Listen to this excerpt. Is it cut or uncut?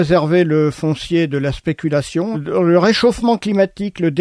cut